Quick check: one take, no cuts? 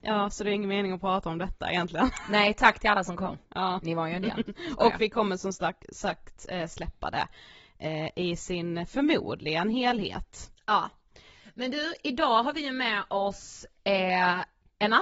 yes; 0 cuts

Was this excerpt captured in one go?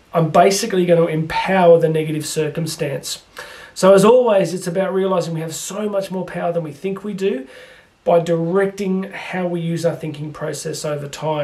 yes; 0 cuts

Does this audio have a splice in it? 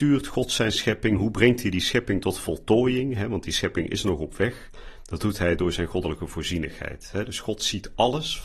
no; 0 cuts

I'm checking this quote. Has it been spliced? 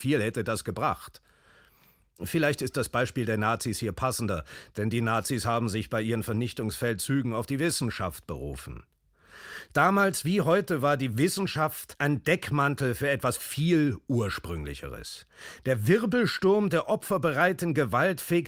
no; 0 cuts

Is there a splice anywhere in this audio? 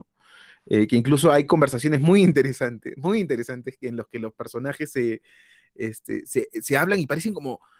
no; 0 cuts

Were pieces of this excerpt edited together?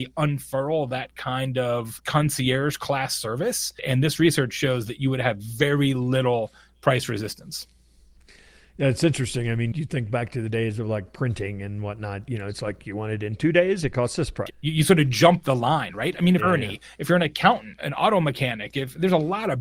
yes; 3 cuts; at 14.5 s, 16.4 s, 17.8 s

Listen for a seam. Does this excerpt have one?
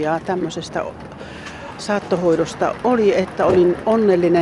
no; 0 cuts

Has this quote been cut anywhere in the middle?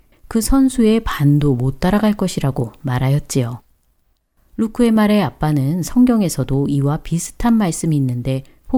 no; 0 cuts

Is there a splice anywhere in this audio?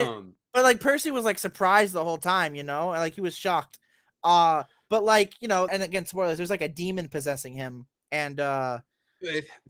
yes; 2 cuts; at 5.7 s, 8.0 s

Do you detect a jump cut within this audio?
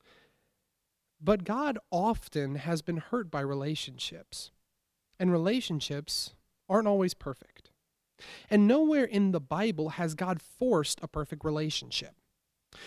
no; 0 cuts

